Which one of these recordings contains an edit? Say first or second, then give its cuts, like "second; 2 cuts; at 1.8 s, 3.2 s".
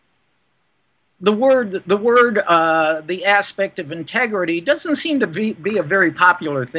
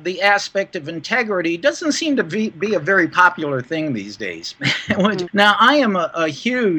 second; 1 cut; at 5.3 s